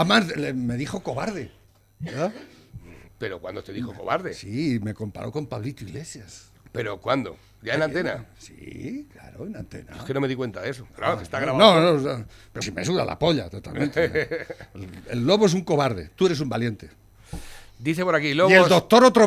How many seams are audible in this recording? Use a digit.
1